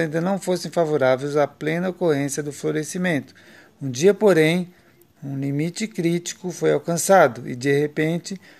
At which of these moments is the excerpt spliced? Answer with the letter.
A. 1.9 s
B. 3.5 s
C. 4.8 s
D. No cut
D